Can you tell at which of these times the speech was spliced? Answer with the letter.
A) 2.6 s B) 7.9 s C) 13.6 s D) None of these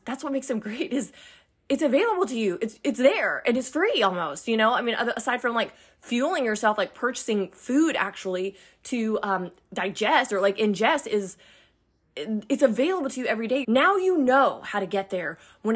C